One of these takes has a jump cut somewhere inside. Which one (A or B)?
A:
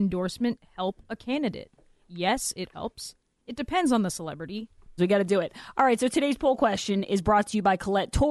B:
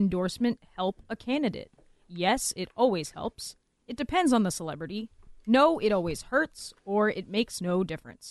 A